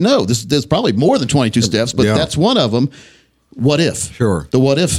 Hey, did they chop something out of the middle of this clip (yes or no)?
no